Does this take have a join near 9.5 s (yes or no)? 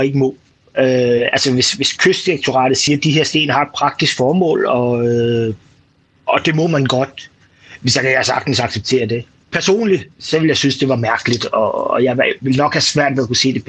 yes